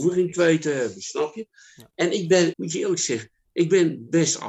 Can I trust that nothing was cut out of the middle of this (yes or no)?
no